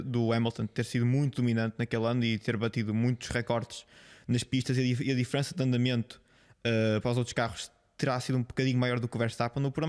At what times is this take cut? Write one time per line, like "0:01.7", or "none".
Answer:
none